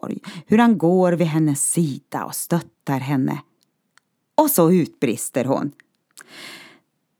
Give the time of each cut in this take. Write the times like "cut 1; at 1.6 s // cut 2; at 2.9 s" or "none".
none